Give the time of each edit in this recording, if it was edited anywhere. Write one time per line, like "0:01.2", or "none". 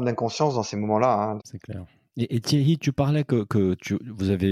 0:01.4